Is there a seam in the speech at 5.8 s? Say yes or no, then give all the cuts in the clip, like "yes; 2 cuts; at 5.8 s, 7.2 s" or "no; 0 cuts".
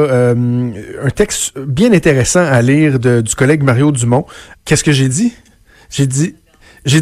no; 1 cut; at 4.5 s